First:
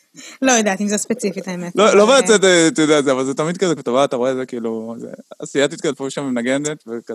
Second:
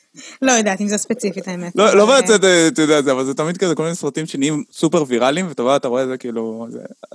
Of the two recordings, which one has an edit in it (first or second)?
first